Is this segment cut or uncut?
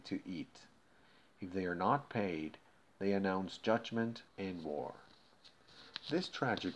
cut